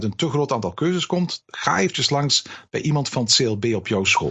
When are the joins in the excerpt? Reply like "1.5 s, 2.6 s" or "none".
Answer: 1.4 s